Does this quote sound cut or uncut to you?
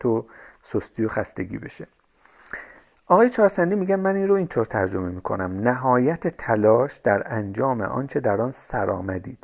uncut